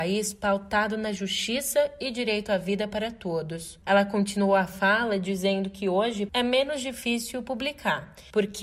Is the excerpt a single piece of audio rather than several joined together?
no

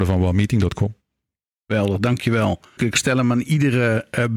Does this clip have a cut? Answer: yes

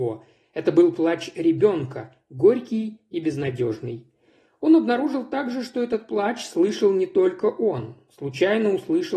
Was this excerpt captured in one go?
yes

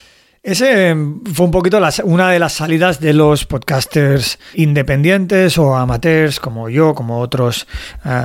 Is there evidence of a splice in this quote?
yes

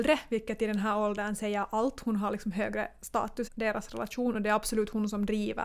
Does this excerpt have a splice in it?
yes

